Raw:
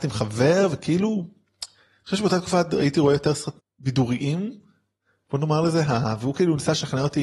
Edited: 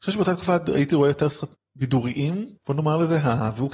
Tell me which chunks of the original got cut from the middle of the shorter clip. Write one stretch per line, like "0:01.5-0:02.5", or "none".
0:04.6-0:05.2